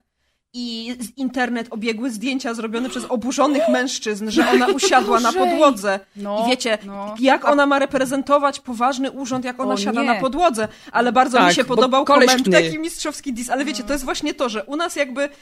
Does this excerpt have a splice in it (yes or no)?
yes